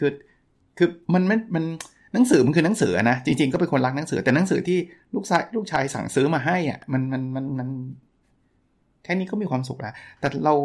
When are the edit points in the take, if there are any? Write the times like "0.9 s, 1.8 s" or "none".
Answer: 1.0 s